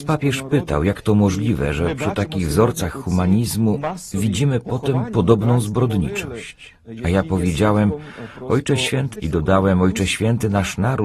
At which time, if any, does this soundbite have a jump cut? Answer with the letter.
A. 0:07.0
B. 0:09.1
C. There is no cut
B